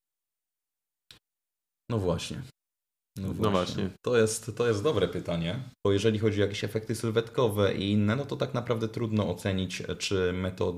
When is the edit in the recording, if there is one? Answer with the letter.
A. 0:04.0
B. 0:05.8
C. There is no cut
B